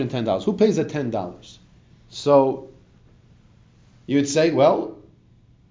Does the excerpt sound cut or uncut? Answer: uncut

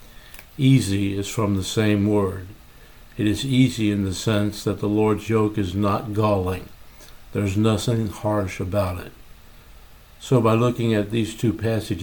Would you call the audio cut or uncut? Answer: uncut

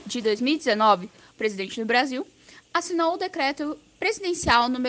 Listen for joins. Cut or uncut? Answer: cut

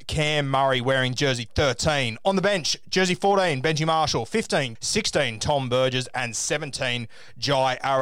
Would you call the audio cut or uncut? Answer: cut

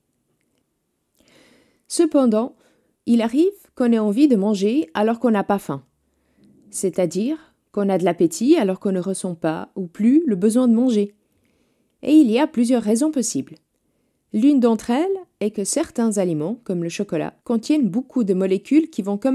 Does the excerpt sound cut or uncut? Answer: cut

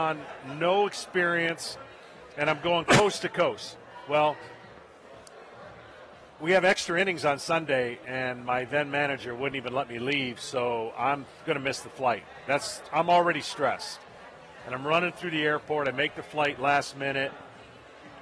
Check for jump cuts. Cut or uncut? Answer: uncut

